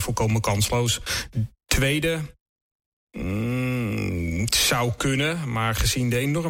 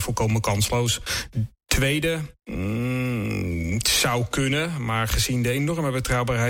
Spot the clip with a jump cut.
second; 1 cut; at 2.4 s

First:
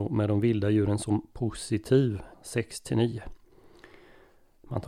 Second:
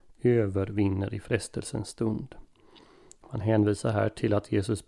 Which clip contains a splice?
first; 1 cut; at 2.3 s

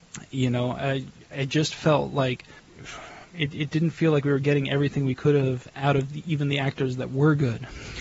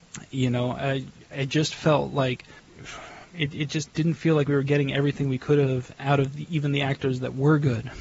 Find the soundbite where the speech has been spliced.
first; 1 cut; at 3.7 s

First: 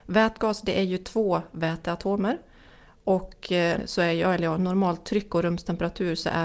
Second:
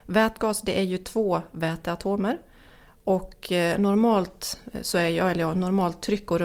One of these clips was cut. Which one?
first; 1 cut; at 3.8 s

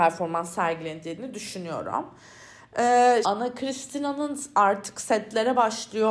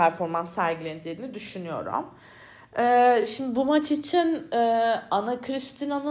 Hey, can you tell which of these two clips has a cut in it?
first; 1 cut; at 3.2 s

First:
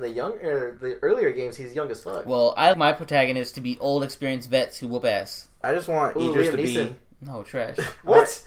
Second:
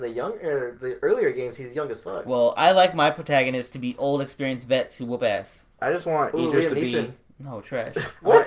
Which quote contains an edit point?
first; 1 cut; at 2.7 s

